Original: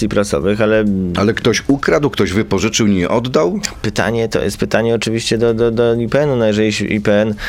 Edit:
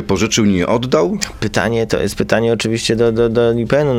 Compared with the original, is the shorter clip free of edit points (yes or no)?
yes